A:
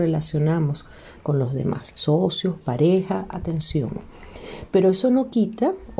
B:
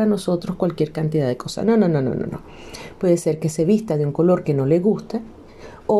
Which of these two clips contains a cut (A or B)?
A